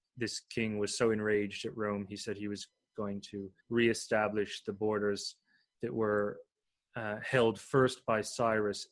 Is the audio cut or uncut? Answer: cut